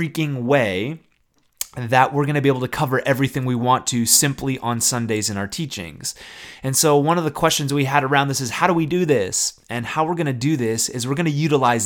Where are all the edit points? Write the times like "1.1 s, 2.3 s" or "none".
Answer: none